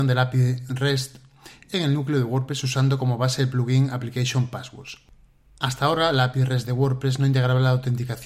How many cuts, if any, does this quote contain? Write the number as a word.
zero